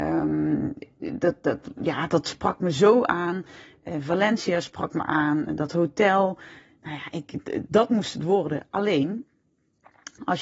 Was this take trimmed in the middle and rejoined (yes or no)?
no